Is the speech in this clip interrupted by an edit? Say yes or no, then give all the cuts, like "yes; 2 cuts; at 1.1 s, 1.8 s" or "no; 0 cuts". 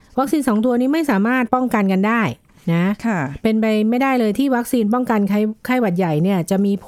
yes; 1 cut; at 1.5 s